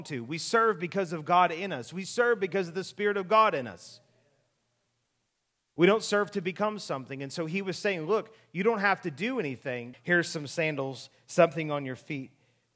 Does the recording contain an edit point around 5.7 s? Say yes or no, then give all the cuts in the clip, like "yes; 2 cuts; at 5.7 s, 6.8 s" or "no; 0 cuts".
no; 1 cut; at 9.9 s